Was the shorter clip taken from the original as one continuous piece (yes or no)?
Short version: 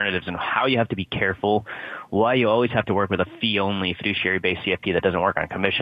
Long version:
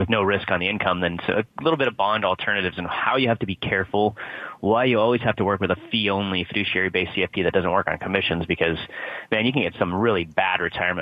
yes